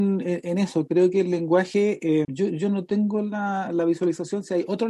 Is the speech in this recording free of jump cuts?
no; 1 cut; at 2.2 s

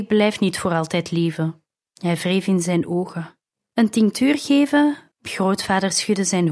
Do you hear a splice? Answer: yes; 3 cuts; at 1.9 s, 3.7 s, 5.1 s

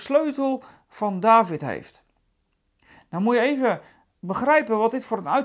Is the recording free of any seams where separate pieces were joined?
yes; 0 cuts

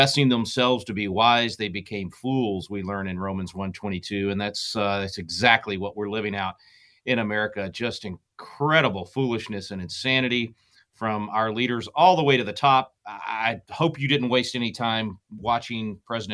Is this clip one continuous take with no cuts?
yes; 0 cuts

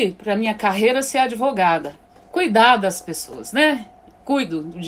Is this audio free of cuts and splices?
yes; 0 cuts

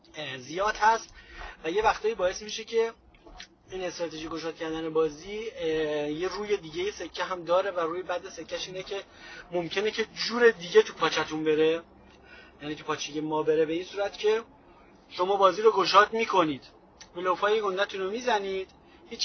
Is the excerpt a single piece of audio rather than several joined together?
yes; 0 cuts

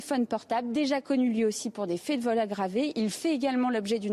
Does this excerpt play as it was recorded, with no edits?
yes; 0 cuts

